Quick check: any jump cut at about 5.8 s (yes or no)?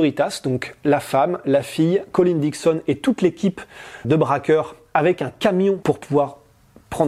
yes